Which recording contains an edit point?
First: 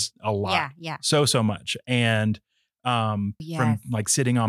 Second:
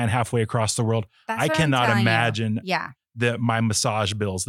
first; 1 cut; at 3.4 s

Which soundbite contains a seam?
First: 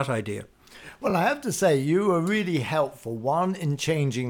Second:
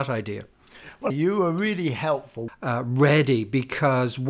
second; 2 cuts; at 1.1 s, 2.5 s

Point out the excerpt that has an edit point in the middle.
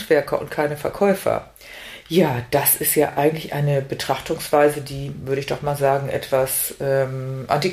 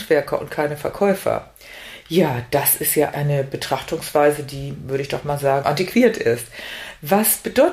second; 2 cuts; at 3.1 s, 5.6 s

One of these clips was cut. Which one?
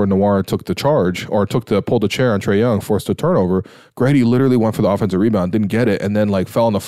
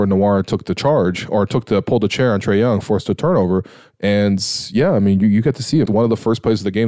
second; 2 cuts; at 3.9 s, 5.9 s

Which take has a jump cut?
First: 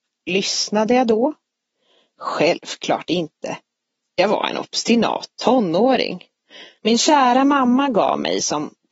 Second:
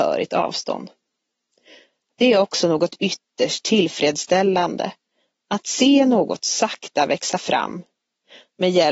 first; 1 cut; at 6.8 s

